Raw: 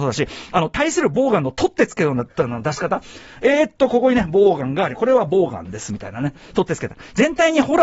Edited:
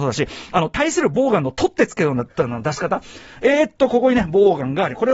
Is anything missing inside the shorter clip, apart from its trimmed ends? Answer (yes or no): no